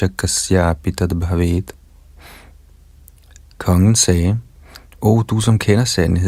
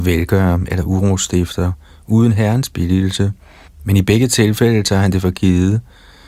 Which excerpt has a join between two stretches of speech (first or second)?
second